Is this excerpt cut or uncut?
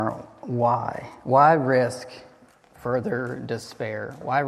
uncut